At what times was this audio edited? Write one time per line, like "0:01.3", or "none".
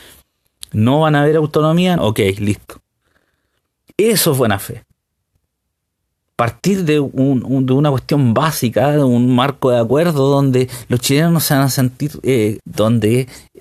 0:02.0
0:12.6